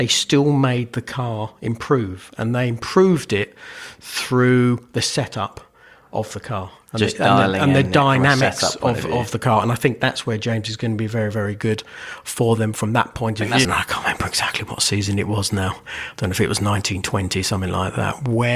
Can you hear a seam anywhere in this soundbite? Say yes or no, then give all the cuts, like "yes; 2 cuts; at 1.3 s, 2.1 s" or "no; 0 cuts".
yes; 1 cut; at 13.6 s